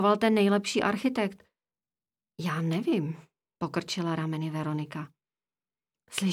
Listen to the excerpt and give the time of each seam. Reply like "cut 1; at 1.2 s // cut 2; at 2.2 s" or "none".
none